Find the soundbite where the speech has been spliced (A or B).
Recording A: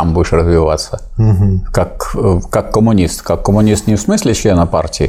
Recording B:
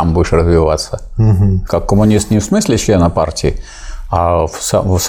B